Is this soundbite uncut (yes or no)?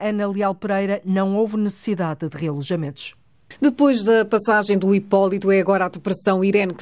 yes